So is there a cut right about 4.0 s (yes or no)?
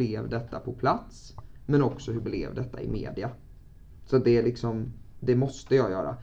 no